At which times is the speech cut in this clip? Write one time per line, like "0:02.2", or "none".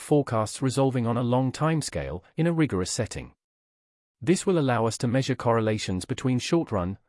none